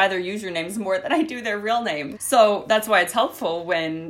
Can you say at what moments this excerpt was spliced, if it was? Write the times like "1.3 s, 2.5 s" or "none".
2.1 s

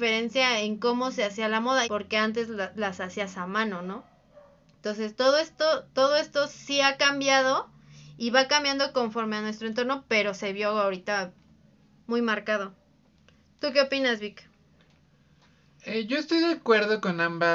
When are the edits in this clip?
1.8 s

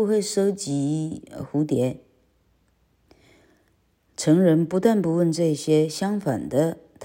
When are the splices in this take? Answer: none

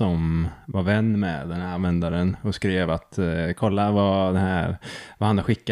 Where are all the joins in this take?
none

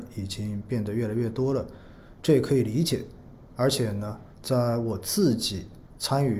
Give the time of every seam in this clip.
3.5 s

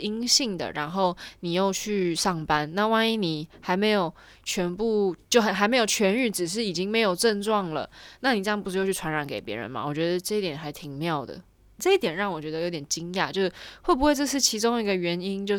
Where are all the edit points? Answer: 11.8 s

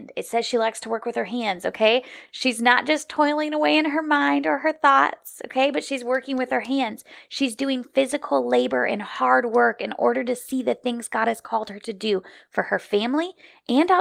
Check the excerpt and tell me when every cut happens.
none

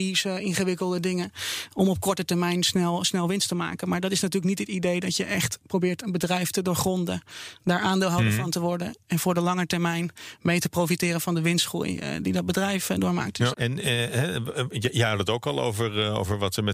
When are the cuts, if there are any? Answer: 13.5 s

